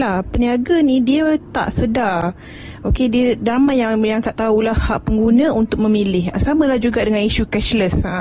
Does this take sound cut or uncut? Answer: uncut